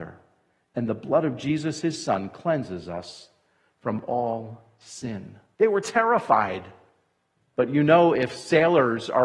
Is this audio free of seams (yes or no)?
no